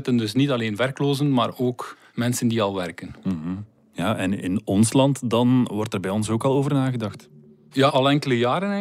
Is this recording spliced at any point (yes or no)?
yes